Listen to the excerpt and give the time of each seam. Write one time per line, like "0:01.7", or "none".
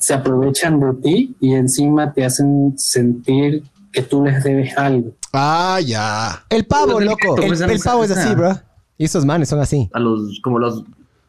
0:07.4
0:09.9